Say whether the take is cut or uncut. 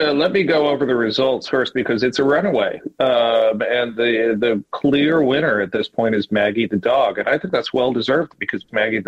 uncut